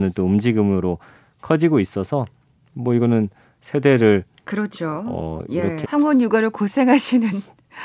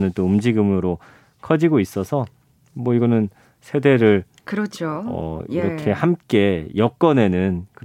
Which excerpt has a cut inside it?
first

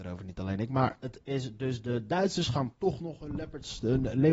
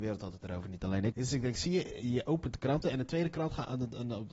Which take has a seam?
second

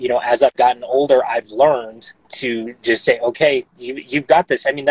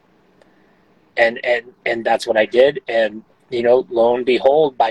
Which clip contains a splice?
first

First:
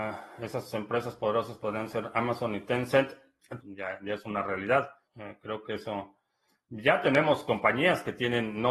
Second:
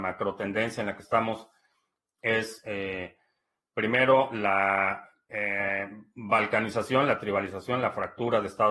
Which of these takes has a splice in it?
first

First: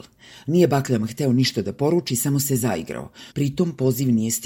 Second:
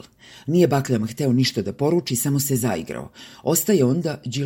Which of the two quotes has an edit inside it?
first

